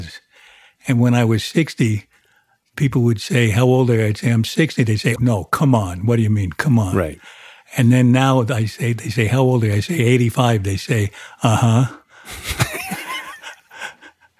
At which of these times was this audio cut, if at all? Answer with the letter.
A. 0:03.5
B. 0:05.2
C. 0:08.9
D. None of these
B